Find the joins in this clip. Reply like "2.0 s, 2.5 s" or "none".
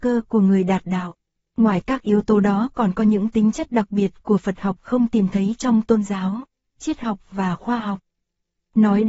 1.5 s

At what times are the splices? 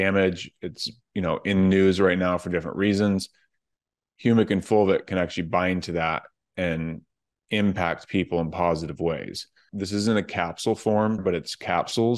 9.7 s, 11.2 s

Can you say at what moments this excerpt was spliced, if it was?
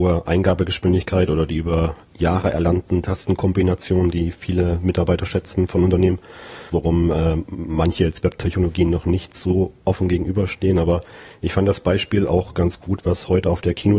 6.7 s

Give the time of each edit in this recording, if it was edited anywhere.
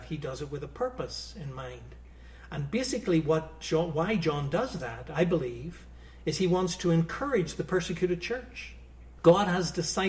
none

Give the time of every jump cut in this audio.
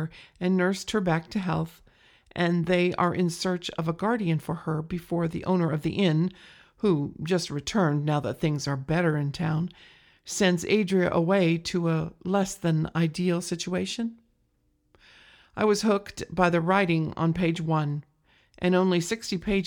none

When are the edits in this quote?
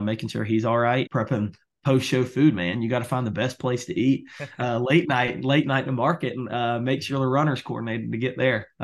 1.1 s

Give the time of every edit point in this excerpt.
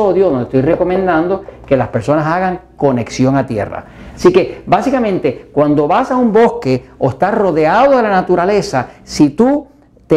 4.1 s

